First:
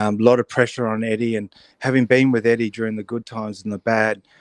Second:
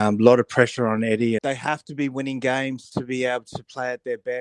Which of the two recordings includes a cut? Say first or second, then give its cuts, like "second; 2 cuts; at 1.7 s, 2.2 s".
second; 1 cut; at 1.4 s